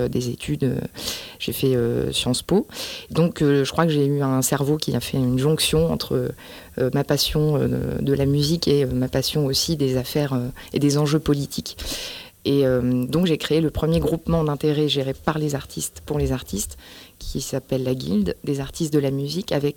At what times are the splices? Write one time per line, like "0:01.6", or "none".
none